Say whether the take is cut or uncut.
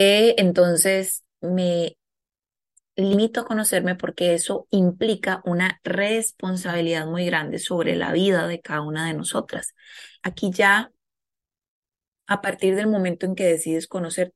cut